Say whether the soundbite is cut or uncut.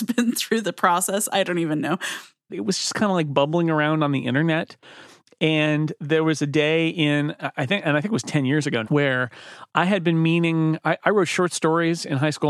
cut